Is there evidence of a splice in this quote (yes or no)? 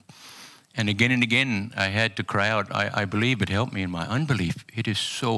no